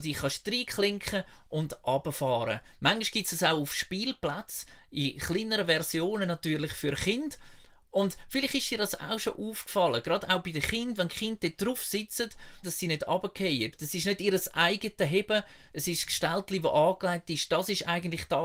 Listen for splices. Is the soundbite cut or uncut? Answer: cut